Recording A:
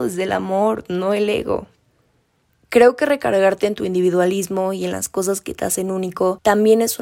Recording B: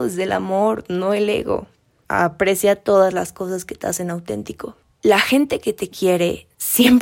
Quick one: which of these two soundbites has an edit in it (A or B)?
B